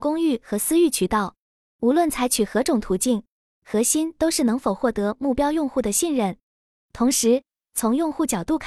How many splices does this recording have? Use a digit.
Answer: 1